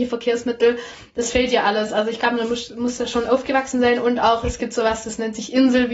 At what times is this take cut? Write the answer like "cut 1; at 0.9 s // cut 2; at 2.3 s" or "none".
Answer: none